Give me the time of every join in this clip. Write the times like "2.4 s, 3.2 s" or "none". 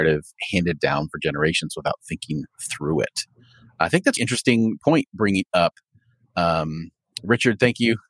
4.2 s